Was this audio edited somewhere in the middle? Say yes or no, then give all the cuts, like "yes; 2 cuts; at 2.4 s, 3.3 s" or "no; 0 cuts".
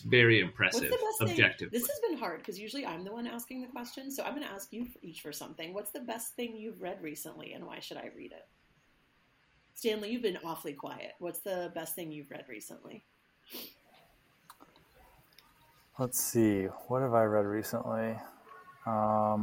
no; 0 cuts